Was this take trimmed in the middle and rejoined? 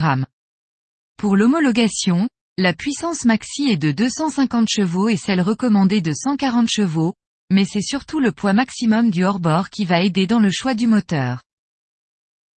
no; 0 cuts

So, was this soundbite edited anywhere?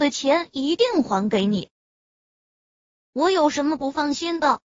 no; 0 cuts

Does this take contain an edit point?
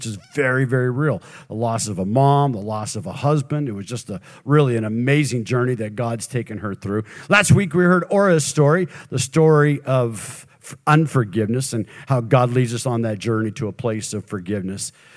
no; 0 cuts

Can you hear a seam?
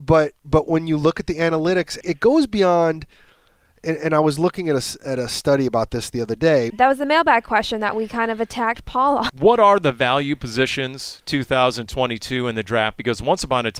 yes; 3 cuts; at 2.0 s, 6.7 s, 9.3 s

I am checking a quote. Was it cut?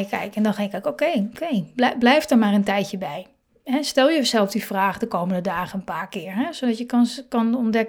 no; 0 cuts

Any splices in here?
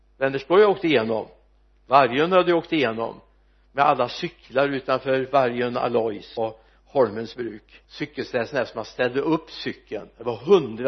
yes; 2 cuts; at 6.4 s, 7.8 s

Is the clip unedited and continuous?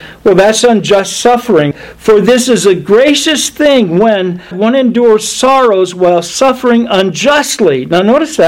no; 2 cuts; at 1.7 s, 4.5 s

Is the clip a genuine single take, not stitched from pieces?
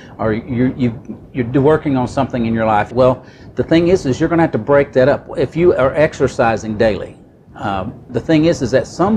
no; 2 cuts; at 2.9 s, 8.1 s

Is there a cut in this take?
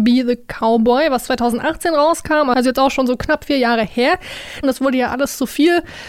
yes; 1 cut; at 4.6 s

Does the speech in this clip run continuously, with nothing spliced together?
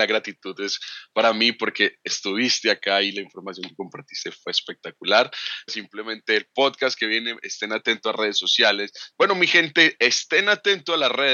no; 2 cuts; at 5.7 s, 9.1 s

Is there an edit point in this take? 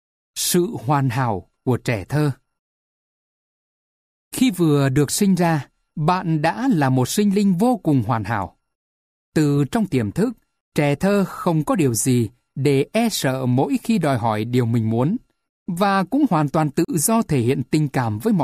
no; 0 cuts

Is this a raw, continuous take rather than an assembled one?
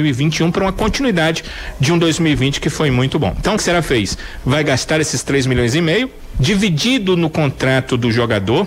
no; 1 cut; at 3.6 s

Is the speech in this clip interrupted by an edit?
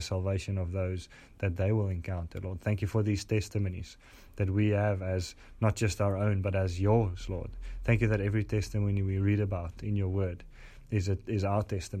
no; 0 cuts

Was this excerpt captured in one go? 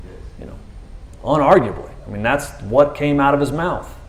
yes; 0 cuts

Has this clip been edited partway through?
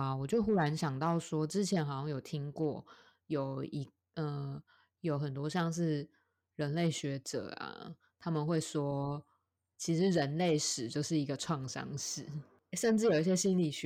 no; 0 cuts

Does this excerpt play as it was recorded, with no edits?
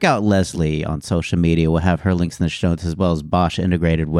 yes; 0 cuts

